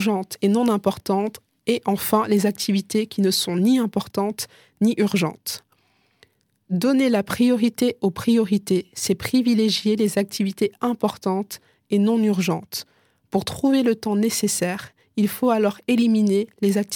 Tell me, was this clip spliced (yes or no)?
no